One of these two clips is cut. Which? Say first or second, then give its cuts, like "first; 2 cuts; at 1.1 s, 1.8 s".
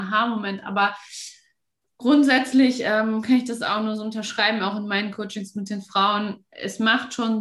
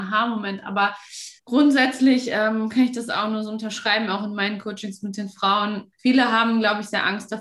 second; 2 cuts; at 1.4 s, 5.9 s